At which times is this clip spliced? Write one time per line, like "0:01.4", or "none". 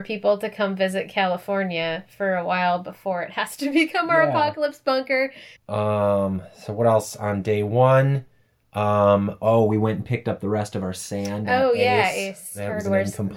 0:05.6